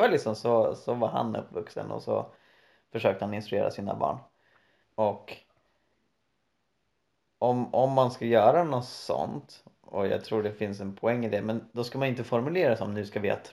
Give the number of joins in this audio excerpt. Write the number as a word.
one